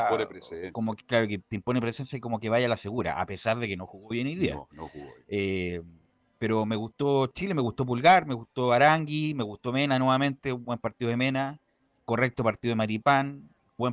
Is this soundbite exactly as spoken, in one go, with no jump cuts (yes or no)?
yes